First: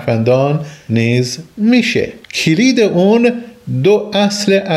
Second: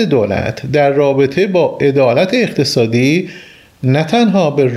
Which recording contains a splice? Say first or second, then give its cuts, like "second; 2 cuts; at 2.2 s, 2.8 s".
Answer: first; 1 cut; at 2.2 s